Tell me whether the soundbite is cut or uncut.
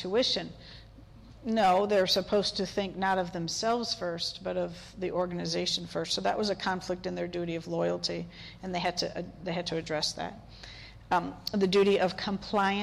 uncut